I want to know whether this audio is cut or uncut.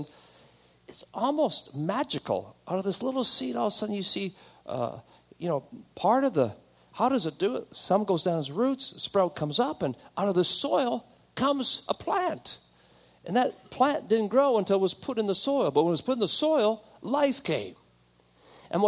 uncut